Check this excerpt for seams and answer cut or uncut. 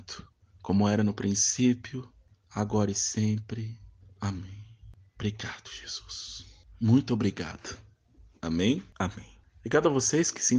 uncut